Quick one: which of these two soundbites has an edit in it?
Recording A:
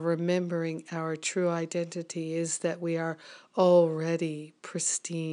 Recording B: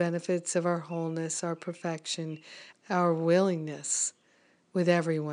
B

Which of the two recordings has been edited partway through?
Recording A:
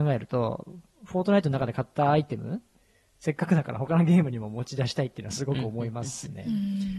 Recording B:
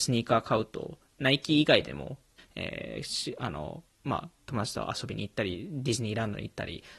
B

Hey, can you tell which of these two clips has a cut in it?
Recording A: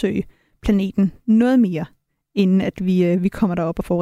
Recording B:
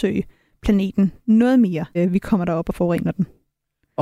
B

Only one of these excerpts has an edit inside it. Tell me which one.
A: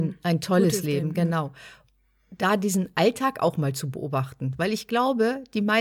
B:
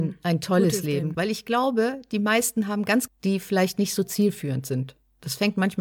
B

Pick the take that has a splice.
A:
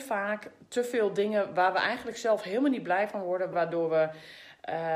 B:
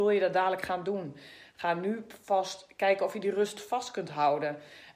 A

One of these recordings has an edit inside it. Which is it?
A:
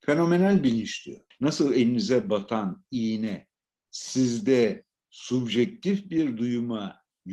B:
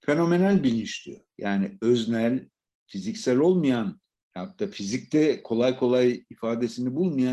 A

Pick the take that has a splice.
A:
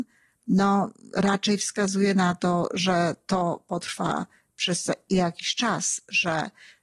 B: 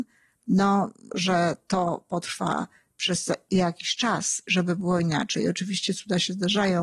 B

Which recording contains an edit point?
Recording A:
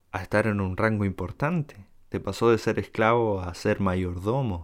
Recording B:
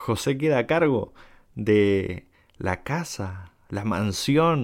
A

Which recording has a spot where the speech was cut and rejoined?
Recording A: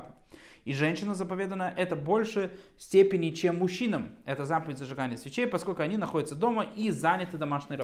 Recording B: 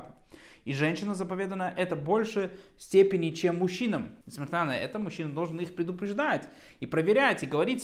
B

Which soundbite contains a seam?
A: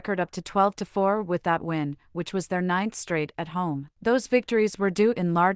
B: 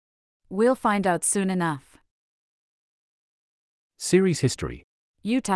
A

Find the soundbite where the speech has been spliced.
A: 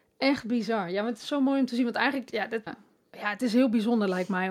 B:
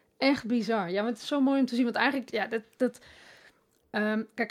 A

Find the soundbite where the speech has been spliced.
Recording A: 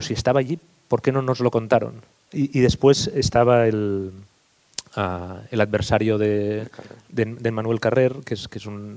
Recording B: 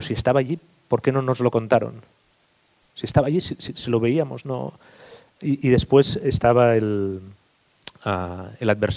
A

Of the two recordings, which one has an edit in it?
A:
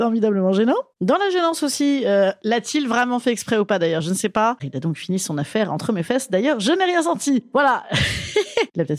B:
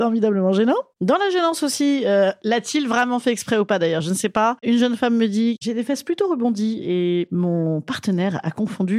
A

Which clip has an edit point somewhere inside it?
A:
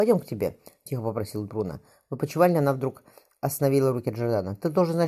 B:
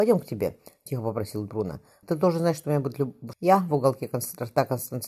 B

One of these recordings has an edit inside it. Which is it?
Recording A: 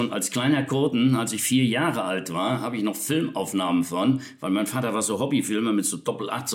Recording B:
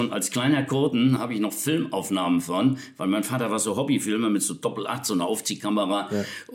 B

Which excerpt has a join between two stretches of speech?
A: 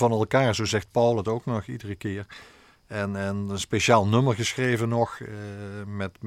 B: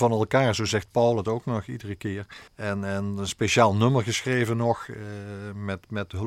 B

